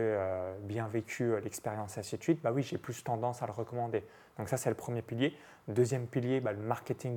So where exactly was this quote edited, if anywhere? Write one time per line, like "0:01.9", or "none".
none